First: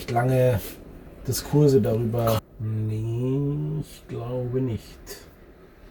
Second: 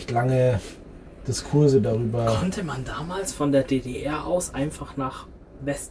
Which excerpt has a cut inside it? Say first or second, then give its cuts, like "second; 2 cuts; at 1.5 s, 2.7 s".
first; 1 cut; at 2.4 s